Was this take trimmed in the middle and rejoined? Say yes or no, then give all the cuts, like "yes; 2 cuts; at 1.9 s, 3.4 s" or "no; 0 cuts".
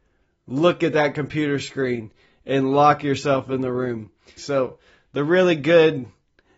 yes; 1 cut; at 4.4 s